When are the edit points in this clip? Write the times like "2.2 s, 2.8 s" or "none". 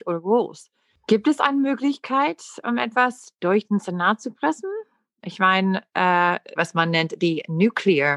6.6 s

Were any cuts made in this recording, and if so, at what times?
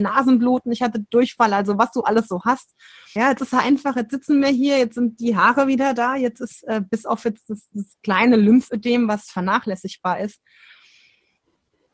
3.2 s

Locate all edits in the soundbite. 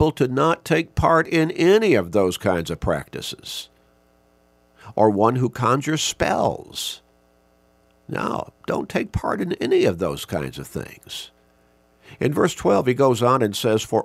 none

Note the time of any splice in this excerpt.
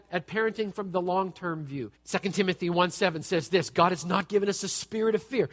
1.9 s

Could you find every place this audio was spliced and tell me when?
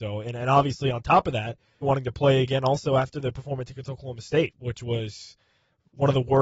1.8 s

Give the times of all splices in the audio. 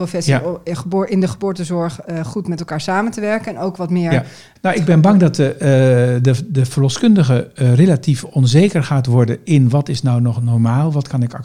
4.6 s

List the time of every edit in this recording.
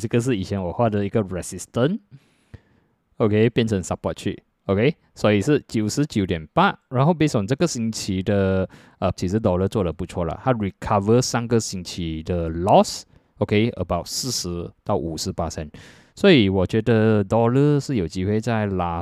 9.2 s

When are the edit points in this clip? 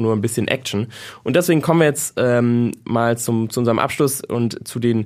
none

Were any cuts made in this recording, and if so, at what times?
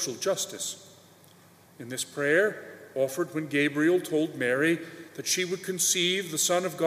1.7 s

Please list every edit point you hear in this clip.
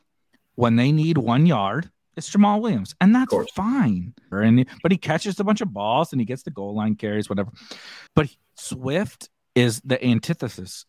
4.3 s, 8.1 s

